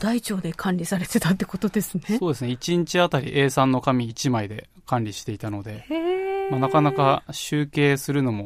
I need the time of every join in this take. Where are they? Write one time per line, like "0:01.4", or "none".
none